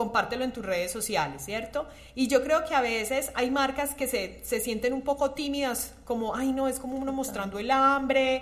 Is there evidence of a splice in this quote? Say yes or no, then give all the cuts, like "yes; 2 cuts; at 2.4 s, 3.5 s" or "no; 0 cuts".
no; 0 cuts